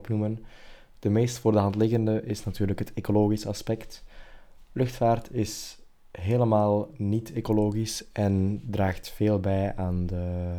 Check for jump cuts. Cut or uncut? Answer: uncut